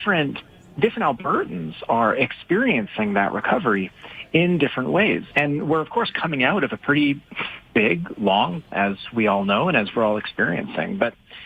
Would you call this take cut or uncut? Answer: cut